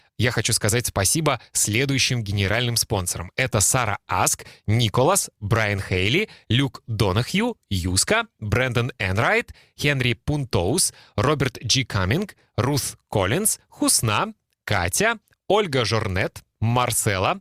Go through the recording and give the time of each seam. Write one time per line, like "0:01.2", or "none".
none